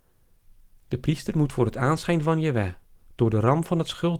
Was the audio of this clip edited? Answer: no; 0 cuts

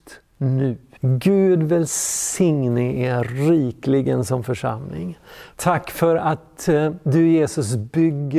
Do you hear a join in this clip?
yes; 2 cuts; at 1.0 s, 5.5 s

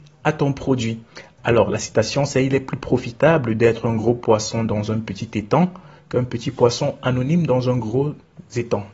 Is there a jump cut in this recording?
yes; 1 cut; at 1.4 s

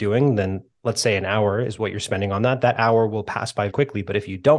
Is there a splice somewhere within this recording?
yes; 1 cut; at 3.7 s

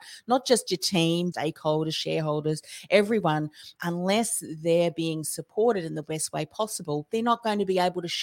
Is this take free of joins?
no; 2 cuts; at 1.3 s, 3.8 s

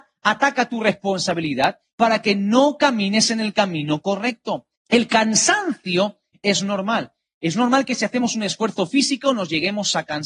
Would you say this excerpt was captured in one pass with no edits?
no; 1 cut; at 4.8 s

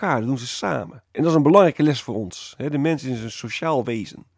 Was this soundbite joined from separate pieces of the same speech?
yes; 1 cut; at 1.1 s

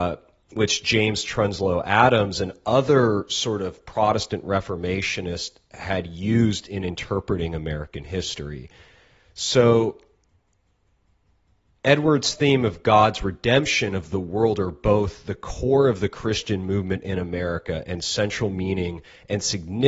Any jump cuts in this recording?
no; 0 cuts

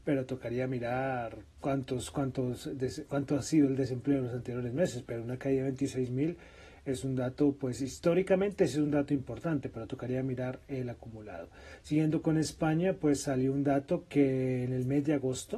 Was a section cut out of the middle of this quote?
no; 0 cuts

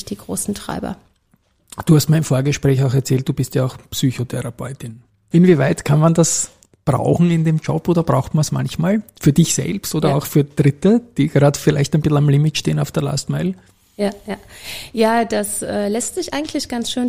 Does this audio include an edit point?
yes; 1 cut; at 5.3 s

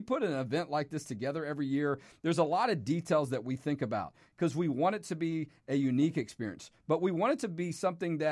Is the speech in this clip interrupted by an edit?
no; 0 cuts

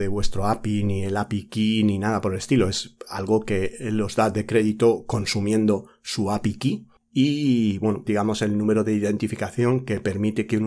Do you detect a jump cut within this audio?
yes; 1 cut; at 8.1 s

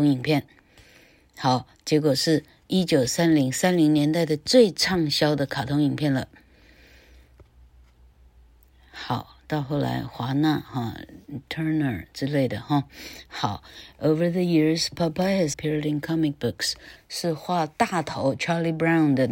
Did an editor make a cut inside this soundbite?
yes; 2 cuts; at 15.5 s, 17.0 s

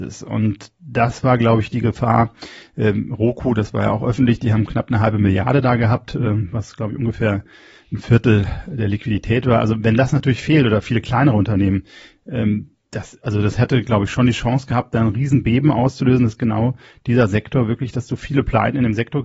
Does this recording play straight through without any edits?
yes; 0 cuts

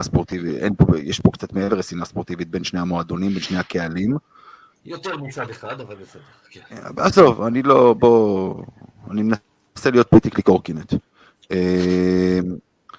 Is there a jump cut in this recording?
no; 0 cuts

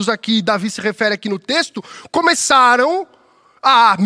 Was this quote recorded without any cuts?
yes; 0 cuts

